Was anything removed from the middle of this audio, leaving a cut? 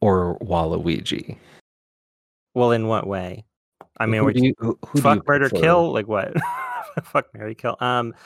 no; 0 cuts

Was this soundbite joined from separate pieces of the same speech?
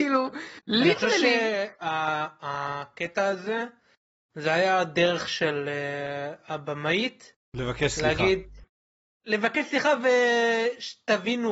no; 0 cuts

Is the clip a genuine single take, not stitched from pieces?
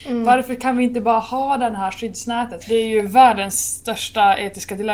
no; 1 cut; at 2.6 s

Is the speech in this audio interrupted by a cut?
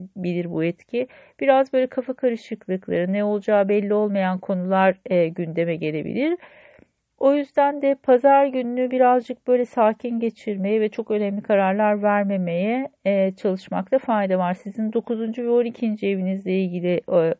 no; 0 cuts

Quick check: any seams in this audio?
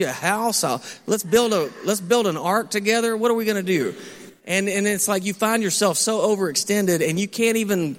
no; 0 cuts

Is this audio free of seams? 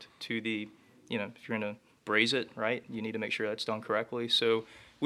yes; 0 cuts

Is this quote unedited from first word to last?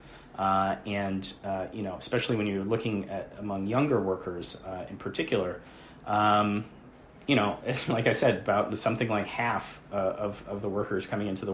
yes; 0 cuts

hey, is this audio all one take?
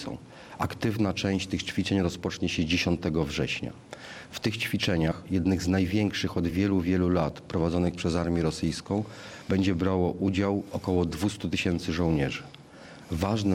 yes; 0 cuts

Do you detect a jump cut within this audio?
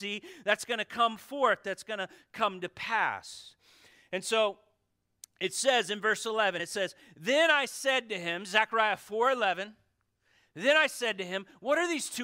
no; 0 cuts

